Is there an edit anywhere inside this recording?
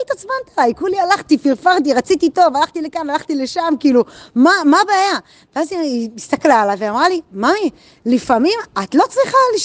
no; 0 cuts

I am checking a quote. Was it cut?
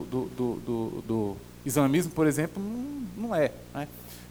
no; 0 cuts

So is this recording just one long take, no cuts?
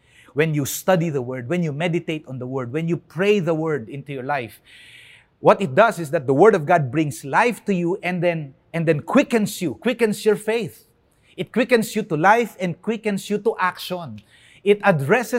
yes; 0 cuts

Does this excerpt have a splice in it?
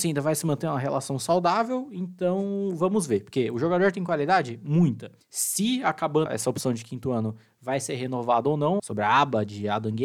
yes; 2 cuts; at 6.3 s, 8.8 s

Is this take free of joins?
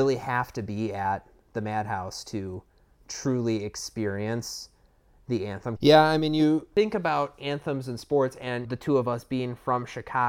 no; 1 cut; at 5.8 s

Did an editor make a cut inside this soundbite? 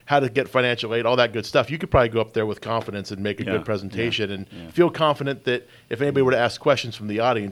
no; 0 cuts

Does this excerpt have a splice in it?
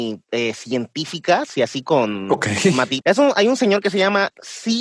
yes; 1 cut; at 3.0 s

